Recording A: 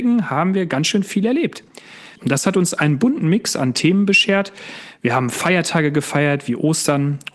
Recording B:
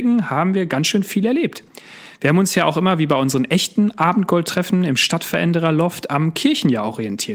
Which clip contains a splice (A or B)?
A